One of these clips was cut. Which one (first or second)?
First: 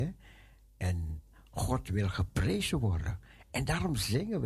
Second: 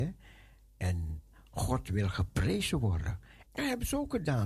second